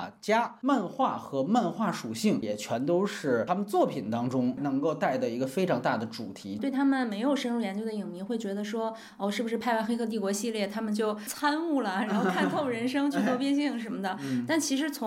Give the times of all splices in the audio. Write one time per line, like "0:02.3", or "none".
none